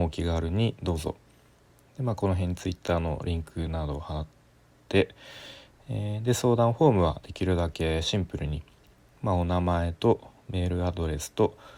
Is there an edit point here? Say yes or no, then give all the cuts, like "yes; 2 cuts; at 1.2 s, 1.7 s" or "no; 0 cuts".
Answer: no; 0 cuts